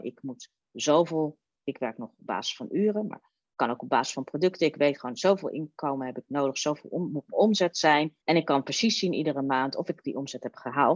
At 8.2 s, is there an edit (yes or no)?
yes